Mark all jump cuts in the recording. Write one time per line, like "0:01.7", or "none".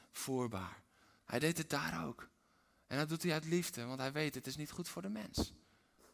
0:01.2